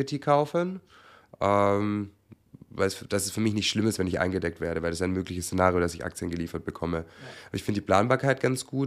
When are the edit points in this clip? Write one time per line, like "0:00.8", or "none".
none